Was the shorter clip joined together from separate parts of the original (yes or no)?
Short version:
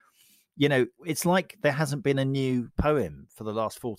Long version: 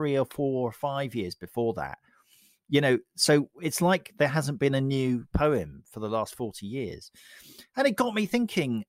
yes